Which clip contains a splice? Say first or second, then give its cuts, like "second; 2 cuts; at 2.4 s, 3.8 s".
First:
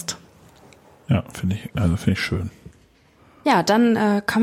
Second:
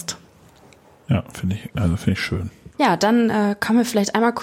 second; 1 cut; at 2.7 s